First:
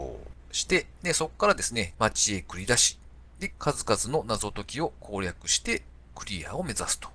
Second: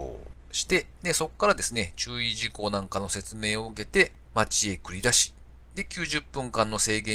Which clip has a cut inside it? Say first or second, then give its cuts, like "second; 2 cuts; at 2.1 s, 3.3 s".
first; 2 cuts; at 1.9 s, 3.5 s